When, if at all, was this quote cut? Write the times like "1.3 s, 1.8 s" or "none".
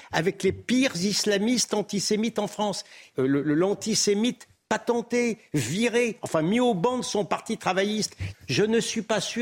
3.1 s, 8.3 s